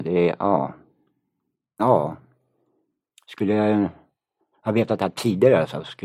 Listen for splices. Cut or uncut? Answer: uncut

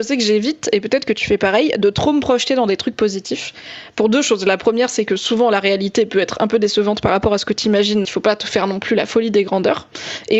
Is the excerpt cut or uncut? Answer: cut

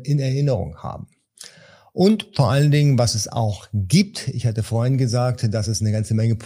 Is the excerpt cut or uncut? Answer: uncut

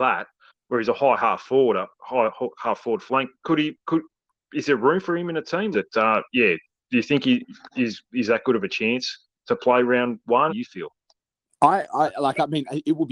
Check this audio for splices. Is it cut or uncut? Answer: cut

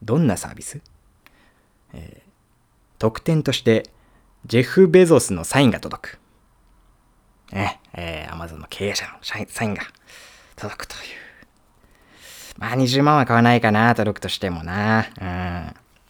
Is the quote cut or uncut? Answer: uncut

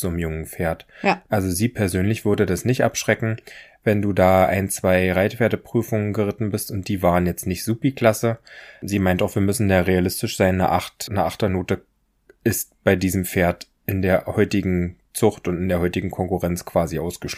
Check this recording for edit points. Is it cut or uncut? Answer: cut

